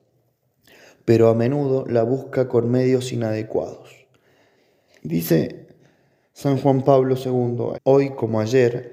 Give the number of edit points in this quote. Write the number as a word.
two